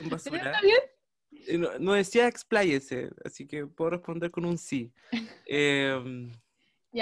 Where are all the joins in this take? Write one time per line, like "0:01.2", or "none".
0:01.8